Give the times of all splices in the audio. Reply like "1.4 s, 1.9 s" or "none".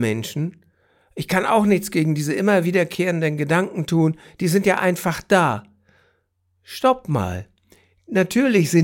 none